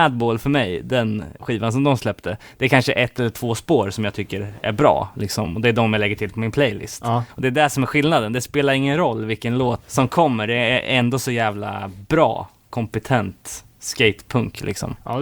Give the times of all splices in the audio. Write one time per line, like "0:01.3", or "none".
0:01.4
0:07.3
0:09.8